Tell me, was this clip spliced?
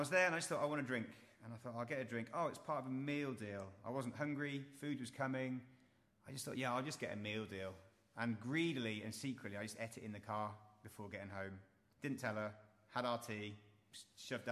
no; 0 cuts

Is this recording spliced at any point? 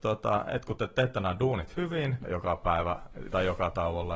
yes; 1 cut; at 2.2 s

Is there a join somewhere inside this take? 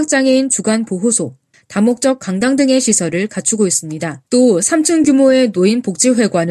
yes; 2 cuts; at 1.5 s, 4.3 s

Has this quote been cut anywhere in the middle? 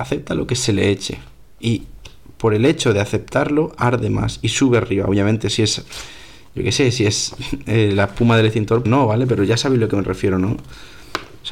yes; 1 cut; at 8.8 s

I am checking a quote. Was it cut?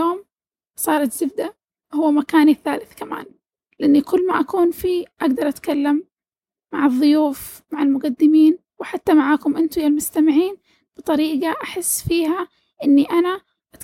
no; 0 cuts

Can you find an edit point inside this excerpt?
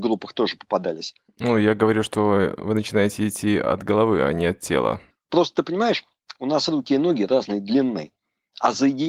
no; 0 cuts

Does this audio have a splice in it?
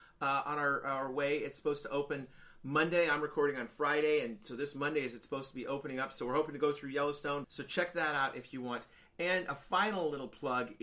yes; 1 cut; at 7.4 s

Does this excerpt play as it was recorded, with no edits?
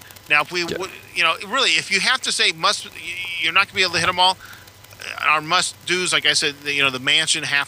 yes; 0 cuts

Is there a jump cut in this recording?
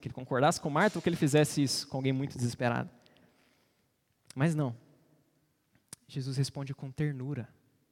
no; 0 cuts

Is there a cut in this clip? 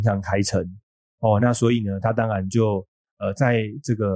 no; 0 cuts

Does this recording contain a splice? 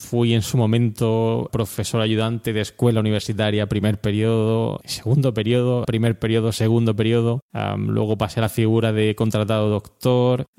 yes; 1 cut; at 5.8 s

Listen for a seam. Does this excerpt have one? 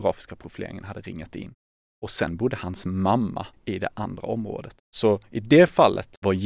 yes; 2 cuts; at 3.5 s, 4.8 s

